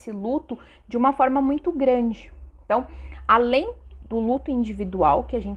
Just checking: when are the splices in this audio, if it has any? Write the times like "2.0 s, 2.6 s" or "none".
none